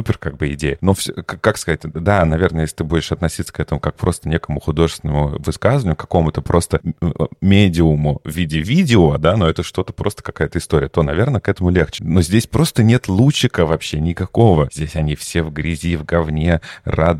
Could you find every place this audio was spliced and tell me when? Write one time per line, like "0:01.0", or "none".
0:12.0